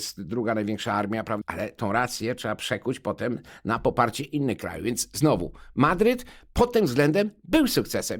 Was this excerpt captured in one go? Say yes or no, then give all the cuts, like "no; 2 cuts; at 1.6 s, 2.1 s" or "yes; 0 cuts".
no; 1 cut; at 1.4 s